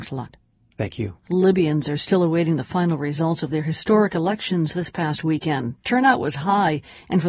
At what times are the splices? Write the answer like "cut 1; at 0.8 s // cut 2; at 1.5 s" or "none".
cut 1; at 1.2 s